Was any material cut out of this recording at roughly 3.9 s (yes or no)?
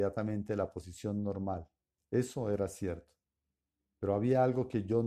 no